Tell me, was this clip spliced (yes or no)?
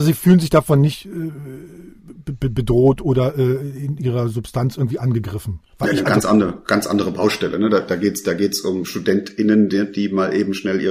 yes